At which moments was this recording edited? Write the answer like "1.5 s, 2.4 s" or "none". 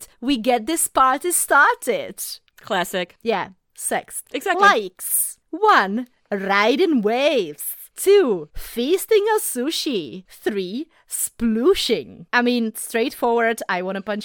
4.2 s